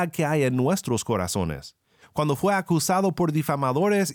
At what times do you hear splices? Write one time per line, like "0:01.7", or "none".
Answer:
0:02.0